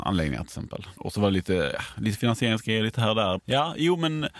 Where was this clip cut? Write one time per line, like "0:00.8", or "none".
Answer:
0:01.0
0:03.4